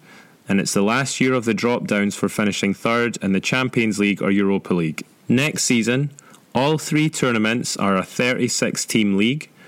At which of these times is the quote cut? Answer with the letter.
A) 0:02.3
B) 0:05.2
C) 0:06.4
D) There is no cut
B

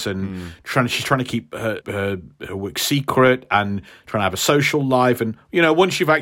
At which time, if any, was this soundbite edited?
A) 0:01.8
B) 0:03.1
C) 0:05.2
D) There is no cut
A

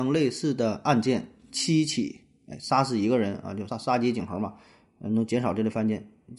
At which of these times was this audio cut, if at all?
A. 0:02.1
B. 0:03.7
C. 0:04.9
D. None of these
B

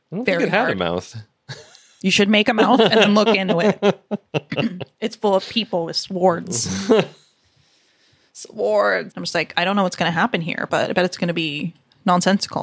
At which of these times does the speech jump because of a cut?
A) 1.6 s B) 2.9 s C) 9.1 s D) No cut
C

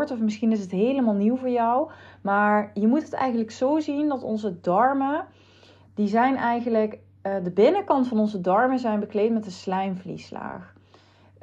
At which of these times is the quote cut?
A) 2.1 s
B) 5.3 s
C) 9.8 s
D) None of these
D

